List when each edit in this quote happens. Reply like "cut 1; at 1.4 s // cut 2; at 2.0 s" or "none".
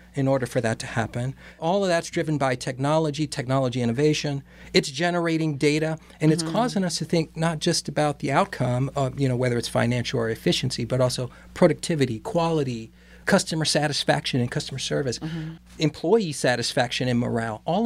none